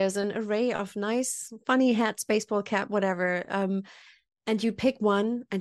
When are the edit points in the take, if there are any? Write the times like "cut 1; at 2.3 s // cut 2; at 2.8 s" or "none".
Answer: none